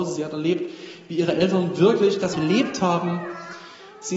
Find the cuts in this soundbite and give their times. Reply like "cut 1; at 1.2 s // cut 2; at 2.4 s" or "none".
cut 1; at 2.3 s